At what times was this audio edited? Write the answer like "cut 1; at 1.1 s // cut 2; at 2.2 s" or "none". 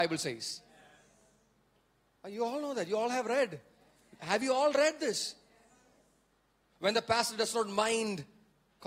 cut 1; at 6.7 s